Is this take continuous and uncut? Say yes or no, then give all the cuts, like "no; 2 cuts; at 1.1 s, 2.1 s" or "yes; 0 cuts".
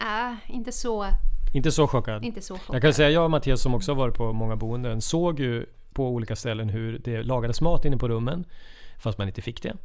yes; 0 cuts